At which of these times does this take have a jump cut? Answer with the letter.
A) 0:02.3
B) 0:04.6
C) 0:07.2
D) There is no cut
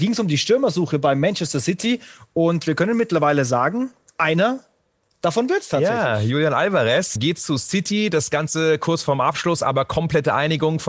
C